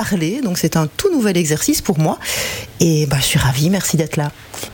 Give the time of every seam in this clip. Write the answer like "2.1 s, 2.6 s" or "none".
none